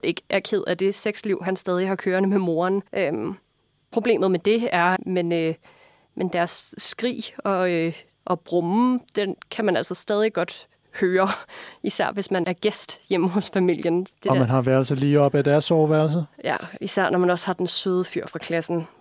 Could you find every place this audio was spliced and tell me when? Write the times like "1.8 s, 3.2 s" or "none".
2.9 s, 5.0 s, 12.4 s